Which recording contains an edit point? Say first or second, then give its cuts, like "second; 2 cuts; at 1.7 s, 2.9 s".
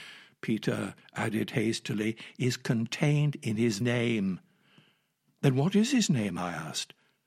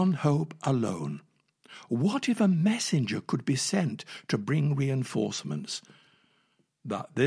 first; 1 cut; at 3.8 s